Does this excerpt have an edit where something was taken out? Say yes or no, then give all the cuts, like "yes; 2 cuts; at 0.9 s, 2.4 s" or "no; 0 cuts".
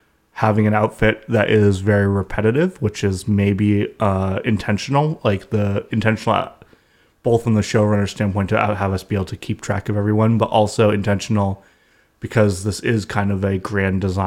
no; 0 cuts